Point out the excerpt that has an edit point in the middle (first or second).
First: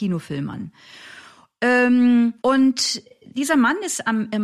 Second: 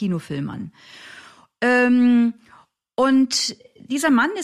first